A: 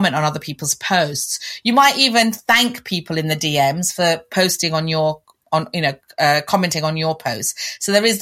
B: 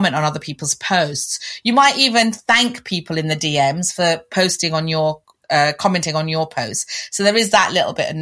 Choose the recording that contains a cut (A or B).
B